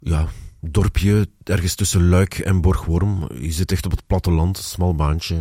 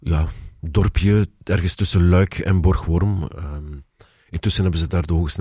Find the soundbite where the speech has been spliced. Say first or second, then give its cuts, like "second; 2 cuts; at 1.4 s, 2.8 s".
second; 1 cut; at 3.3 s